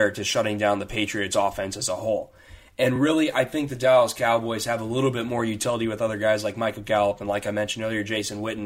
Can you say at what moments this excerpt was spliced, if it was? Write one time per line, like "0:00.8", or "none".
none